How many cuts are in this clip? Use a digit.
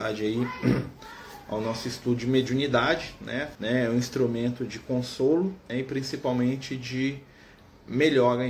2